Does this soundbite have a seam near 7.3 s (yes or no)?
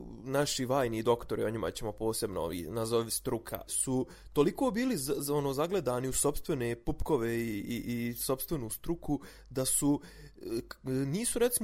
no